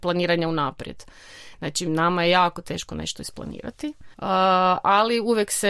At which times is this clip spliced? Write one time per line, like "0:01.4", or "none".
0:04.1